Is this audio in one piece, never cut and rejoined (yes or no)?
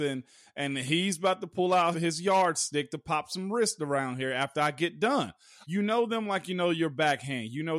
no